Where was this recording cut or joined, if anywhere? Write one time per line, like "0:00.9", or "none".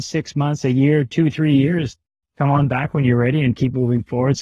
none